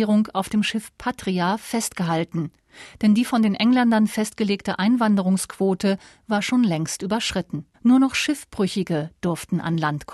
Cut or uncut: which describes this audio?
cut